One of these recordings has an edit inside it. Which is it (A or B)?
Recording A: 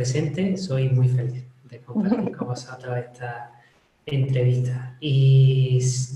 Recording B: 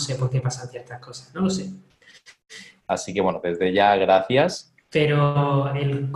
B